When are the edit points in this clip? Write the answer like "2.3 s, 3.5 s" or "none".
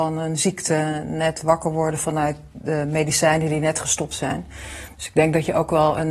none

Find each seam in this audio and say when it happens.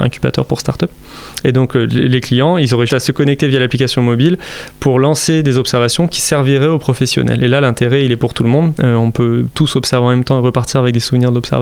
1.4 s, 2.9 s, 8.8 s

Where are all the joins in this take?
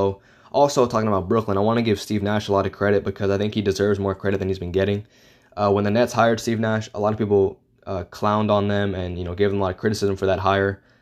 none

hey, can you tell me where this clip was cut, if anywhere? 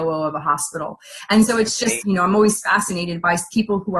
2.0 s

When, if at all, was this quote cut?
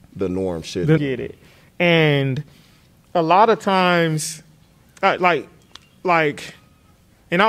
1.0 s

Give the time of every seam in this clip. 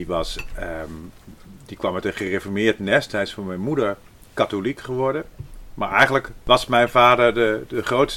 none

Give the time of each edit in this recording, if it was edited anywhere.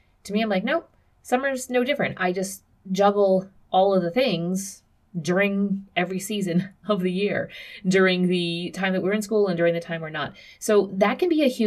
none

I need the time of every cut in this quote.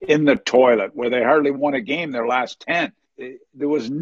3.1 s

